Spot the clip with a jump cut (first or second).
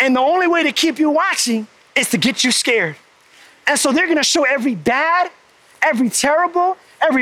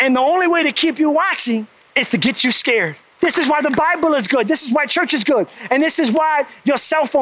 second